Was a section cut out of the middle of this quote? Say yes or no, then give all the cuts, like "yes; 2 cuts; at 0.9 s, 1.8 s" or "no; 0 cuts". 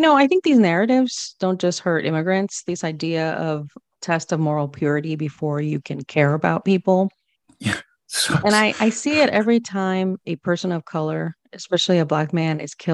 no; 0 cuts